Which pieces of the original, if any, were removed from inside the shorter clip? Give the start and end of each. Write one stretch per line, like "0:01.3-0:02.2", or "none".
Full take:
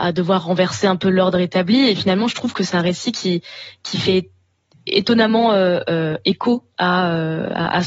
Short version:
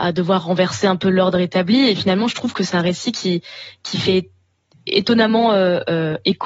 none